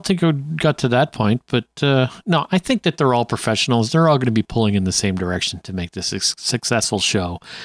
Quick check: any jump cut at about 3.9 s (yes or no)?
no